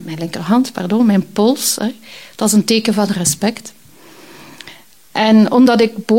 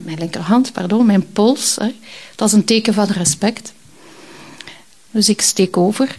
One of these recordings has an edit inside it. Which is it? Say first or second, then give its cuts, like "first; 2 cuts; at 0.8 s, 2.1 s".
second; 1 cut; at 5.1 s